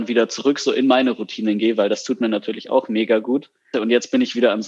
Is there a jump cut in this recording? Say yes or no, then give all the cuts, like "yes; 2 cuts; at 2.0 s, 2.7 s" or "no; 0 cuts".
yes; 1 cut; at 3.7 s